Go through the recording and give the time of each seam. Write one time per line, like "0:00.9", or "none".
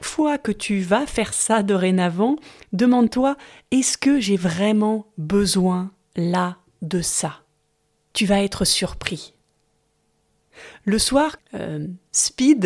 0:11.4